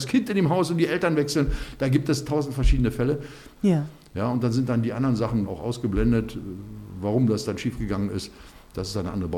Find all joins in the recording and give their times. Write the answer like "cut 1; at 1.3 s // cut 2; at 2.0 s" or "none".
cut 1; at 3.6 s // cut 2; at 5.5 s